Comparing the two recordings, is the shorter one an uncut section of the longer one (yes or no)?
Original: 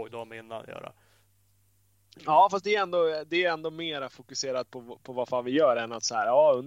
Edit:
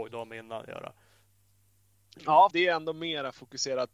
no